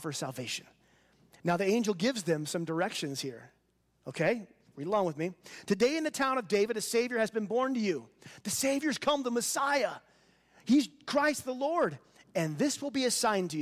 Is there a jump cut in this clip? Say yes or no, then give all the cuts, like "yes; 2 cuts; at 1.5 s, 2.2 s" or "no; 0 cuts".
no; 0 cuts